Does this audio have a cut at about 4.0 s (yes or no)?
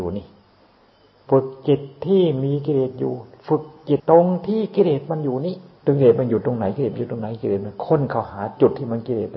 yes